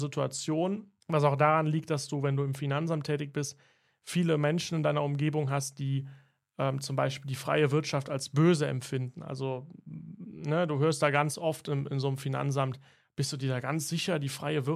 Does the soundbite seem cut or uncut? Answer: cut